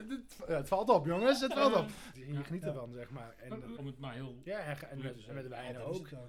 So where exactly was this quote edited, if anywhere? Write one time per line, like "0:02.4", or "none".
0:02.1
0:03.8

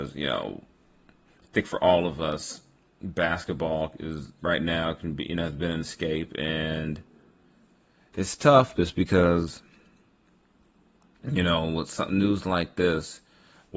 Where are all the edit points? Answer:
none

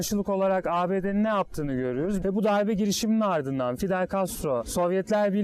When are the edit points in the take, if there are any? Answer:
0:02.2

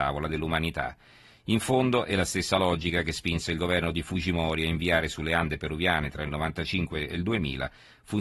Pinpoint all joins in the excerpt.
none

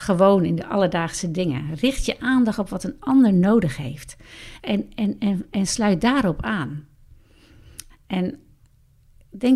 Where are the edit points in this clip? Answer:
0:04.6
0:07.9

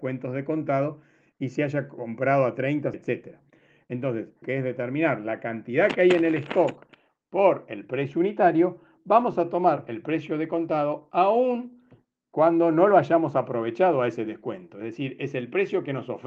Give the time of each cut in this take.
0:02.9
0:04.4

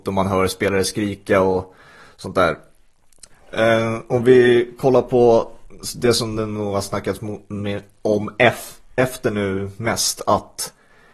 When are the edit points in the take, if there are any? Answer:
0:03.3

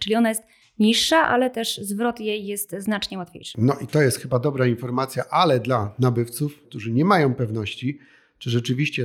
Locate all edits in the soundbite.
0:06.6

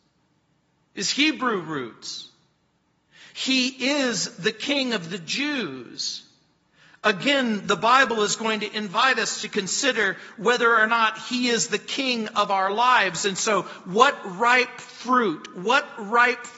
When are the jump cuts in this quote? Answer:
none

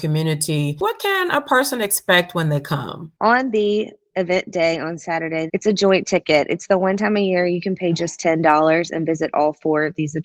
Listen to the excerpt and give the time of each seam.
0:05.5

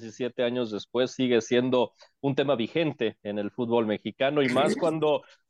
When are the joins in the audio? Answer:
none

